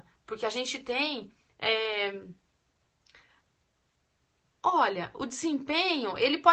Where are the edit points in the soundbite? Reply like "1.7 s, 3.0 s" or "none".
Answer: none